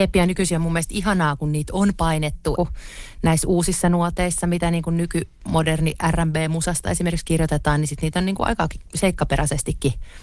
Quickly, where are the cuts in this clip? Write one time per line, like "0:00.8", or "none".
0:02.5